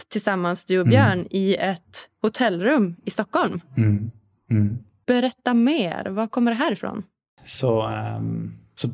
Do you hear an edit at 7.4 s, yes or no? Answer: yes